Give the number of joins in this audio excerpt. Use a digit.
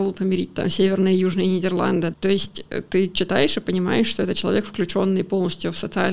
1